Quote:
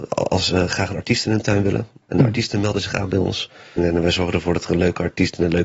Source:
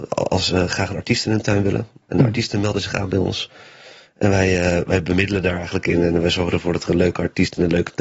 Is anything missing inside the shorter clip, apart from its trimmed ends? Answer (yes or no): yes